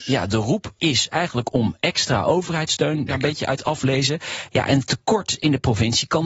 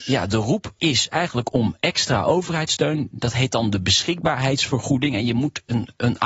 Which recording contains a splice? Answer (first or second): first